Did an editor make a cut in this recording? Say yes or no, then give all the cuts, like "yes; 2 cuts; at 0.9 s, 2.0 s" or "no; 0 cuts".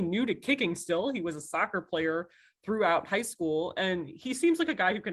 no; 0 cuts